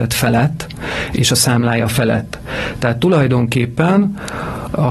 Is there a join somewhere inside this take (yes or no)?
no